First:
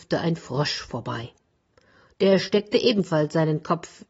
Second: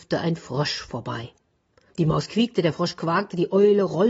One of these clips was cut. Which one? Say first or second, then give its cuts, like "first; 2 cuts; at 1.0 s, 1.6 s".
second; 1 cut; at 1.9 s